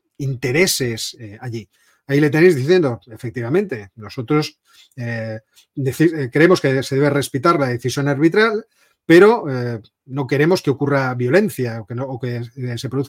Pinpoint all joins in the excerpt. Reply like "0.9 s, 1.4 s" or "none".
none